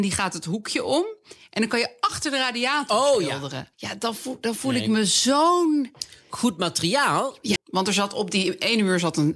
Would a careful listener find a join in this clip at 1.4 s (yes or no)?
no